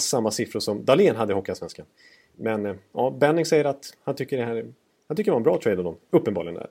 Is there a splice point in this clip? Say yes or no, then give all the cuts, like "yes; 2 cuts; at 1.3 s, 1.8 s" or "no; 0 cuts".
no; 0 cuts